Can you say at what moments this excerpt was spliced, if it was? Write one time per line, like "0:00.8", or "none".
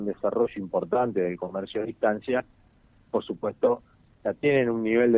none